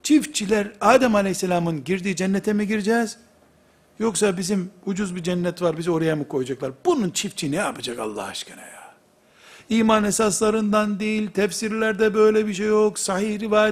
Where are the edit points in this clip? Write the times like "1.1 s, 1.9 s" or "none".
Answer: none

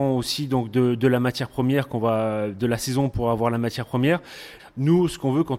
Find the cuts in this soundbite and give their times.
4.6 s

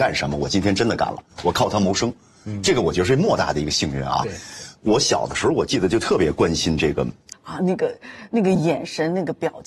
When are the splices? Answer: 1.3 s, 7.3 s

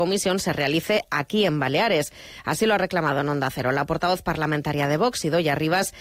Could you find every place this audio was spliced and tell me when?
none

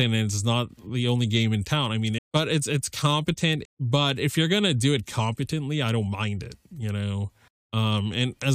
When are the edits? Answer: 2.2 s, 3.6 s

